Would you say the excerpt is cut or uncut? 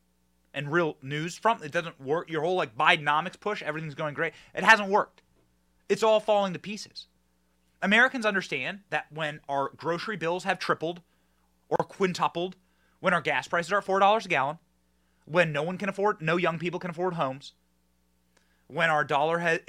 uncut